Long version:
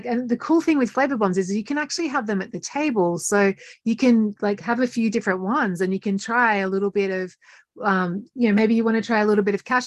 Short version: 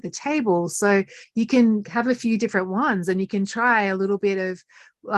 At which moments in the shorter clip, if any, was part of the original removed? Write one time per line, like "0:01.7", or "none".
0:01.8